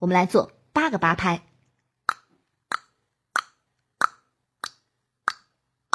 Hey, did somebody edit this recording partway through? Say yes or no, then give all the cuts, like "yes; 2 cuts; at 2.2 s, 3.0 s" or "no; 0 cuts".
no; 0 cuts